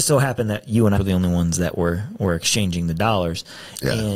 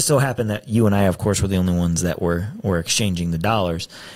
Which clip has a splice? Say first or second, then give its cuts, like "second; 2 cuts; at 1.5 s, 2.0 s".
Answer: first; 1 cut; at 1.0 s